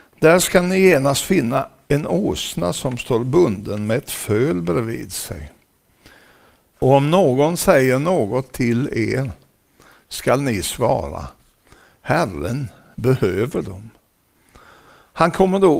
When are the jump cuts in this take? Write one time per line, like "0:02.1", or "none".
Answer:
0:06.7